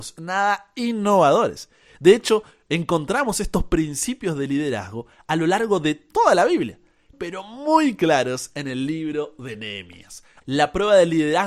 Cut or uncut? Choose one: cut